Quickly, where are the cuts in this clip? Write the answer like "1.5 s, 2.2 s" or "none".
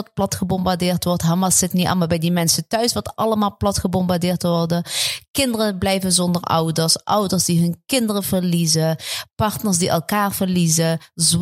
none

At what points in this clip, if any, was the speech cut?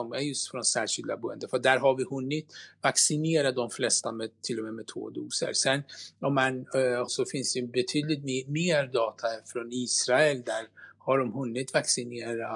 7.1 s

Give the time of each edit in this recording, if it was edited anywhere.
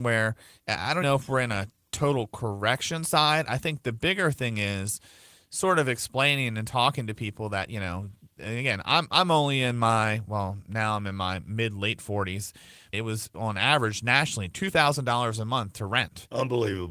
1.0 s, 12.9 s

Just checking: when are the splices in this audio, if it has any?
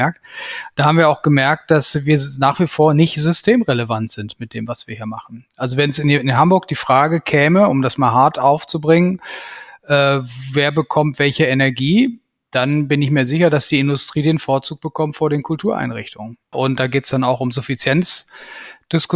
16.5 s

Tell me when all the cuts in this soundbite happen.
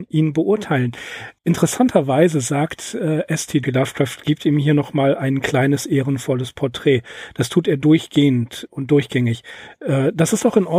1.4 s, 3.6 s

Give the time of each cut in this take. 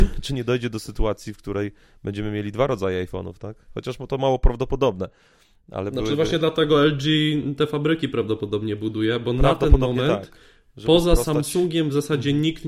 none

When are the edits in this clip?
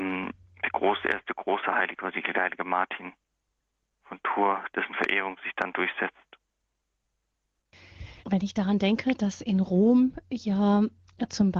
4.7 s, 8.2 s

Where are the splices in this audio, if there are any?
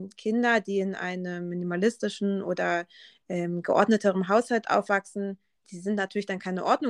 none

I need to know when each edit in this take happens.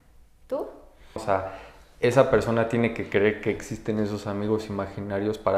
1.2 s

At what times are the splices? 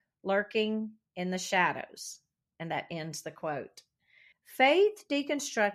4.3 s

